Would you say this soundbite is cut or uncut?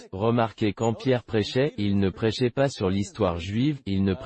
uncut